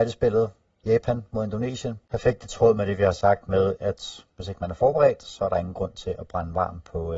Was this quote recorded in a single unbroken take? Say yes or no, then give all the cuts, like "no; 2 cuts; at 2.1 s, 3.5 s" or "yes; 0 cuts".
no; 1 cut; at 2.0 s